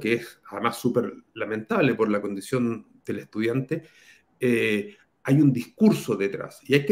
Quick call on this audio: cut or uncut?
uncut